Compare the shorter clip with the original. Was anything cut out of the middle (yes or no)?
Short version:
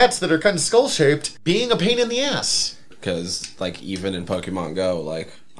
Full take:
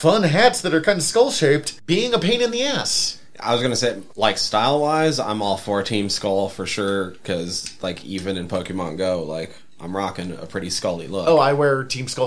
yes